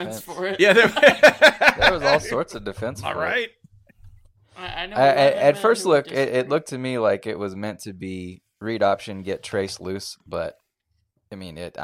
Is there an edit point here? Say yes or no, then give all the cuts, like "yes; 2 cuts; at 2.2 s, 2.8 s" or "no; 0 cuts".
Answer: no; 0 cuts